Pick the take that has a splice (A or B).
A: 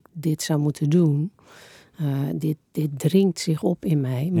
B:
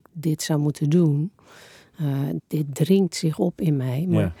B